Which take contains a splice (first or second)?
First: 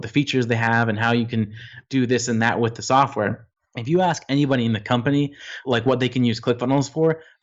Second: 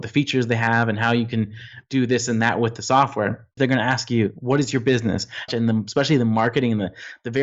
second